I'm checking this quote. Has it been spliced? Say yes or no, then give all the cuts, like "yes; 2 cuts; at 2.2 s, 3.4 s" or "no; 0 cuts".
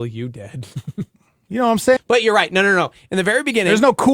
yes; 1 cut; at 2.0 s